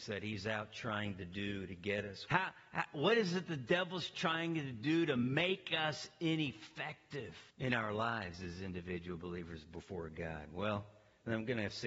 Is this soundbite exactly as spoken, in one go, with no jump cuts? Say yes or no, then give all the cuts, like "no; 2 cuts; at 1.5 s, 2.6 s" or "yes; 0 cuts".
no; 2 cuts; at 2.3 s, 7.5 s